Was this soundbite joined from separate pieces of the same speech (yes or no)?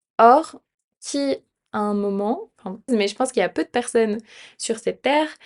yes